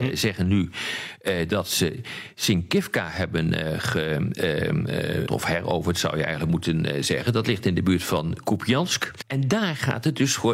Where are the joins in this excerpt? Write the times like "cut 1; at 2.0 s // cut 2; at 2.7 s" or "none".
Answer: cut 1; at 5.3 s // cut 2; at 9.2 s